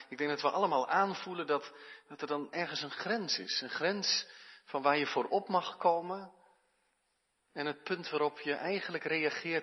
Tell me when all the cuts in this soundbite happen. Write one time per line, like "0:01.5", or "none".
none